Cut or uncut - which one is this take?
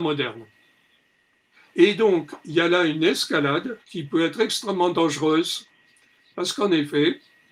cut